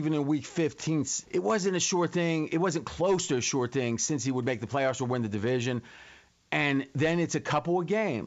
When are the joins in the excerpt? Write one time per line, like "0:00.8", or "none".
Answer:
0:01.2